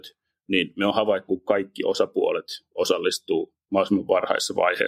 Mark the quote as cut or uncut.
cut